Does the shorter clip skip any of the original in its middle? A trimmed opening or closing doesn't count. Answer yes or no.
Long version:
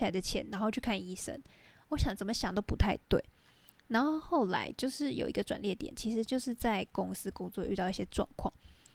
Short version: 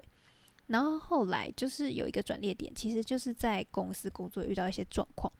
no